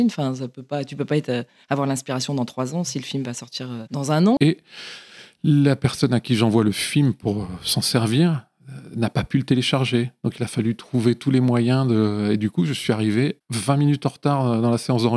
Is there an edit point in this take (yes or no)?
yes